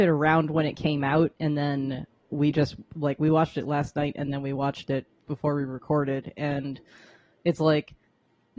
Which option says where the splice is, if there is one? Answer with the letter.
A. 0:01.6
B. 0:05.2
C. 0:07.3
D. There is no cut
B